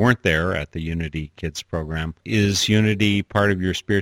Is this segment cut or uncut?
cut